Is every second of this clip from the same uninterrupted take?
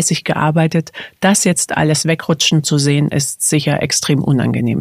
yes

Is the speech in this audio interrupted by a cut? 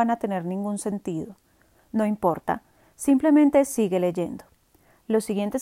no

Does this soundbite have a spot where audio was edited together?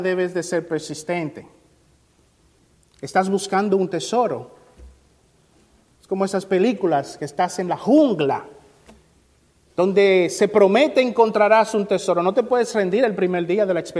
no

